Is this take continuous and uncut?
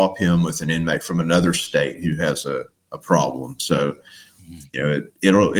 yes; 0 cuts

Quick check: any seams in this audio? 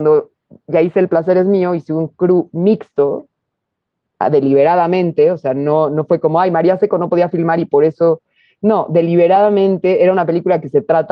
no; 0 cuts

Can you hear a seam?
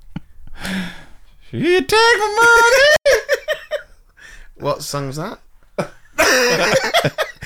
no; 0 cuts

